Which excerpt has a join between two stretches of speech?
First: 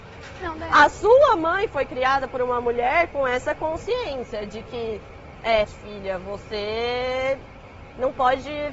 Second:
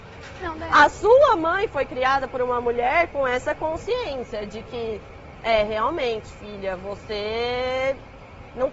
first; 1 cut; at 5.6 s

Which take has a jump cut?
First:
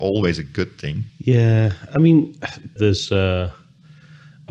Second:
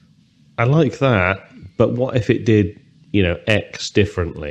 first; 2 cuts; at 1.1 s, 2.8 s

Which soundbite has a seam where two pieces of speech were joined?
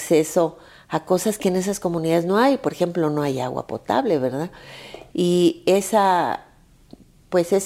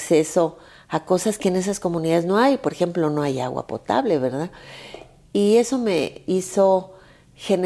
first; 1 cut; at 5.1 s

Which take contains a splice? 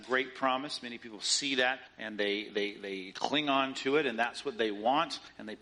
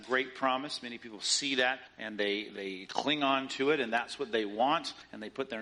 second; 1 cut; at 2.5 s

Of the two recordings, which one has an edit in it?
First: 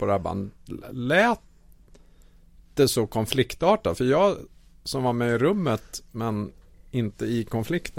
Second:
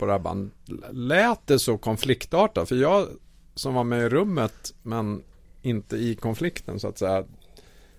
second; 1 cut; at 1.4 s

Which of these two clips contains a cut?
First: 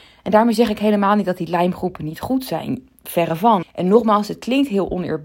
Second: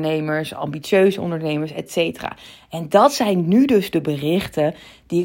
first; 1 cut; at 3.6 s

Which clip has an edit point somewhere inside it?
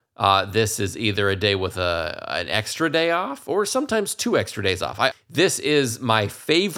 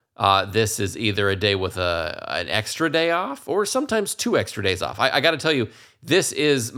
first; 1 cut; at 5.1 s

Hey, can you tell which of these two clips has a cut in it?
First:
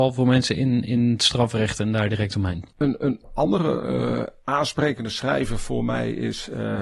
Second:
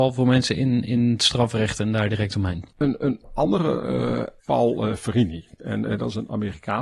second; 1 cut; at 4.4 s

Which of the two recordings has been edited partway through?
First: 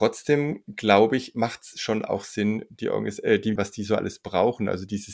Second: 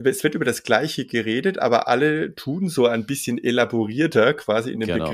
first; 1 cut; at 3.6 s

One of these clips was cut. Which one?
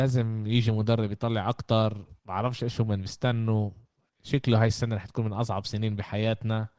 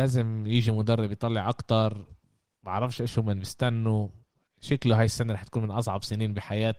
first; 1 cut; at 2.2 s

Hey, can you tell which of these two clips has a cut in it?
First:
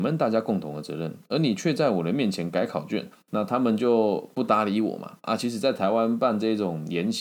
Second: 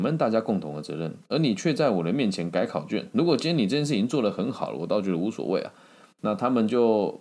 first; 1 cut; at 3.1 s

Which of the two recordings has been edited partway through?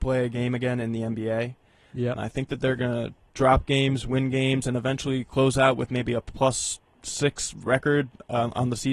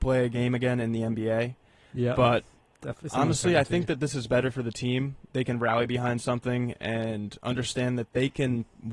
first; 1 cut; at 2.1 s

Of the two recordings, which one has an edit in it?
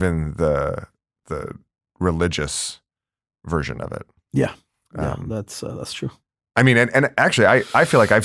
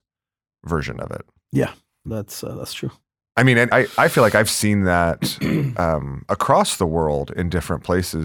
second; 2 cuts; at 2.1 s, 3.7 s

